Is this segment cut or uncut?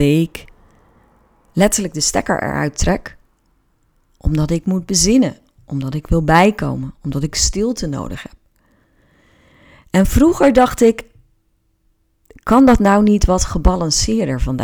uncut